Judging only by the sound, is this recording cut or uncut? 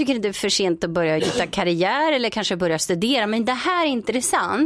cut